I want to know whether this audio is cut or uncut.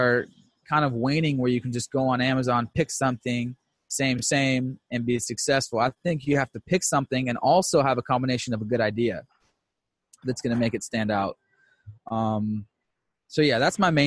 uncut